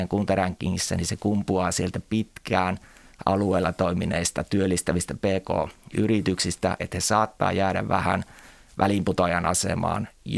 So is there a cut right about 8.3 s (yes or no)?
no